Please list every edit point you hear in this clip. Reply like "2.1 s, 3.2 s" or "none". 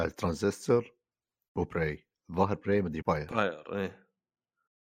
3.0 s